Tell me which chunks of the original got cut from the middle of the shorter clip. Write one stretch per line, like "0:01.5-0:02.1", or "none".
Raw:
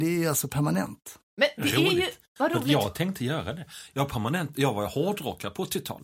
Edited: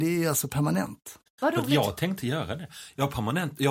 0:01.3-0:02.2

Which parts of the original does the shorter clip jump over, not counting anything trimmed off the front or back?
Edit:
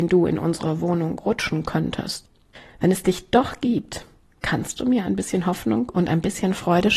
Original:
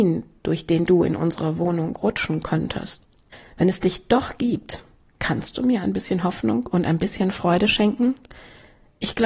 none

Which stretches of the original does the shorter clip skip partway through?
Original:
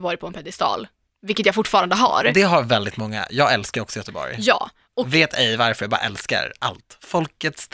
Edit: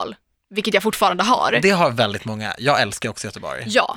none

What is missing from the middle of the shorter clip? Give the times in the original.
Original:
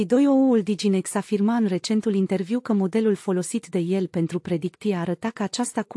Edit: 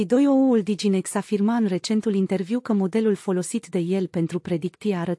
none

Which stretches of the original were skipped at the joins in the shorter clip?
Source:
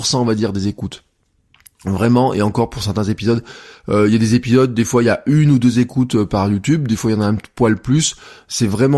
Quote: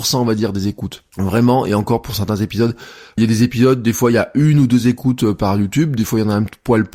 0:01.1-0:01.8
0:03.9-0:04.1

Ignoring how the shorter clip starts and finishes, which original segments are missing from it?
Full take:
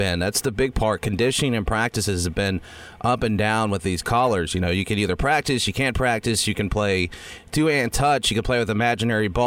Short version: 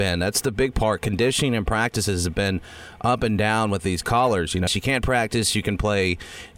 0:04.7-0:05.6

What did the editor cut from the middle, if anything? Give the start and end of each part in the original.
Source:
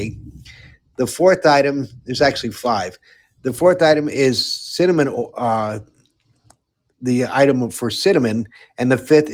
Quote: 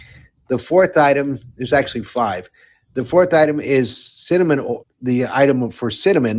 0:05.3-0:06.8

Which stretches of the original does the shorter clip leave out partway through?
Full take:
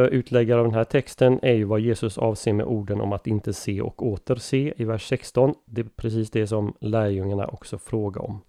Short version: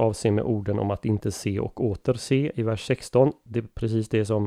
none

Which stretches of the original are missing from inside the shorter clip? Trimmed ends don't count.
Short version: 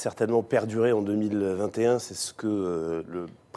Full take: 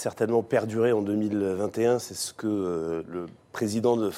none

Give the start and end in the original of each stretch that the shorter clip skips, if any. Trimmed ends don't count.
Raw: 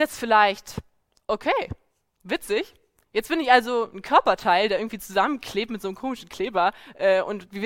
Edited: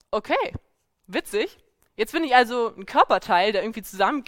none

